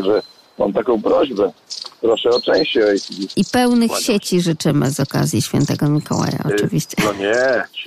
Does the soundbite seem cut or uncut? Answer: cut